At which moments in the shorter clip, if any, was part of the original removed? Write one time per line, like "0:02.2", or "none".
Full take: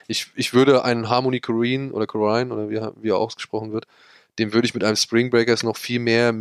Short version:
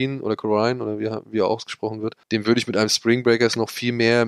0:02.2